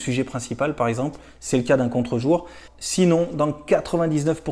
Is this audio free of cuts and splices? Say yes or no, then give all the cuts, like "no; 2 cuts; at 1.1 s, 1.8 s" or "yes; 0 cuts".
no; 1 cut; at 2.7 s